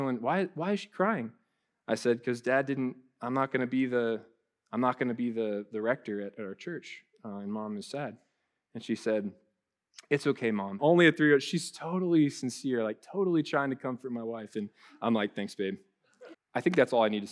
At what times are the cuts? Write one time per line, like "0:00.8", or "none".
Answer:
0:10.8
0:16.3